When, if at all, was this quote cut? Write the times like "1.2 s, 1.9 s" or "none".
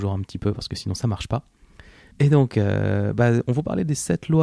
2.1 s